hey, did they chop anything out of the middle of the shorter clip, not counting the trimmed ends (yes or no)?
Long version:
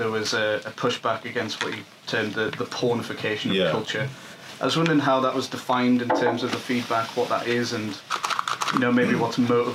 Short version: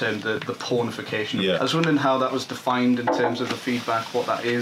yes